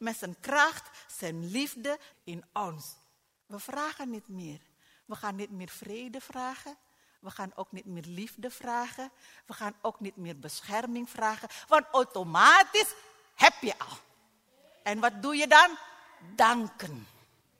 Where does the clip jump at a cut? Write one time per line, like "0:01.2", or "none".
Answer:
0:02.1